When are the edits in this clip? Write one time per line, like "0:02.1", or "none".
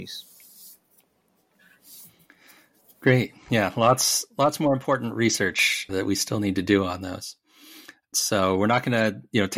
0:05.9
0:08.1